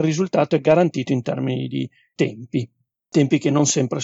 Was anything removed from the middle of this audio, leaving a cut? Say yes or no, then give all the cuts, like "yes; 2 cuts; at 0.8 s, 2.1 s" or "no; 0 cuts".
no; 0 cuts